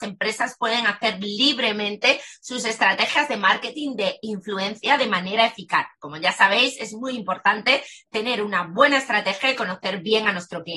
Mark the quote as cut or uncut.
uncut